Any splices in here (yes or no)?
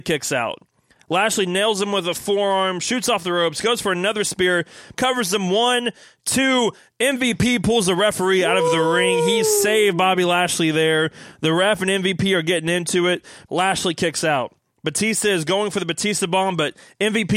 yes